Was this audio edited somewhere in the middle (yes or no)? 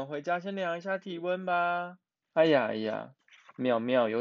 yes